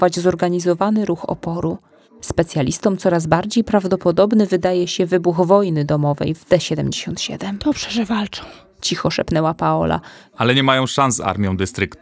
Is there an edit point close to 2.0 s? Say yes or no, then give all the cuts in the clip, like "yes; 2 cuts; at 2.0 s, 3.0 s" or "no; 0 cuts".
no; 1 cut; at 10.3 s